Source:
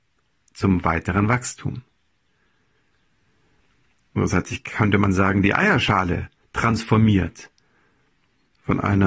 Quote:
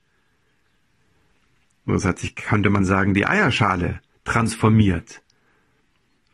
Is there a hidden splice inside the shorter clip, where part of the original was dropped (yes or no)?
no